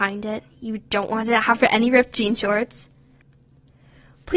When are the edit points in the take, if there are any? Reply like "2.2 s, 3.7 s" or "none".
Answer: none